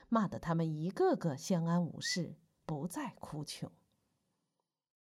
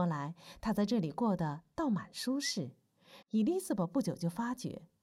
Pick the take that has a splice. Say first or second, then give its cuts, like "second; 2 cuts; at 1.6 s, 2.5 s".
second; 1 cut; at 3.2 s